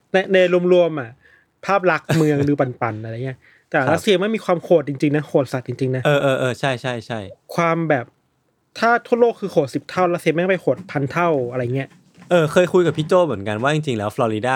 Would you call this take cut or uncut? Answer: uncut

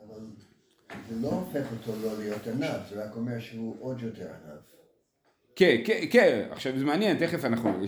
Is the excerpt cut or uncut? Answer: uncut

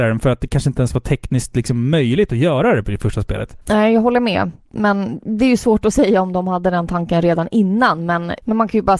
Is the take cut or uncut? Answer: uncut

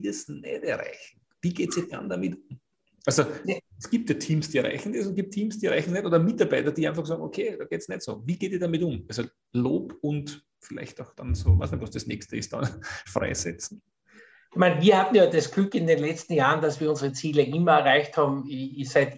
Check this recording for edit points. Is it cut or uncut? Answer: cut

